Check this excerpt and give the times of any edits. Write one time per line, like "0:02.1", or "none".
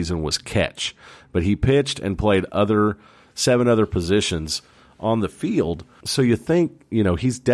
none